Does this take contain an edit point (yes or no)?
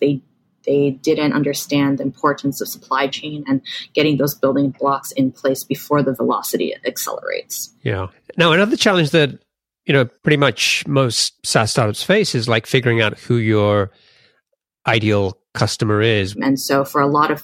yes